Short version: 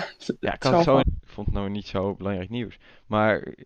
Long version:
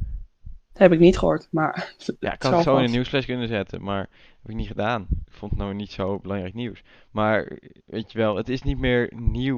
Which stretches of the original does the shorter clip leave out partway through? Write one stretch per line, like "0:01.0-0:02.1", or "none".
0:02.8-0:05.1